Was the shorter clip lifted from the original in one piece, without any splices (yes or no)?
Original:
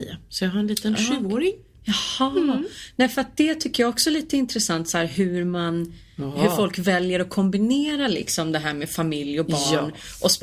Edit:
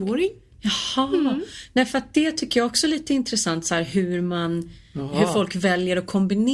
yes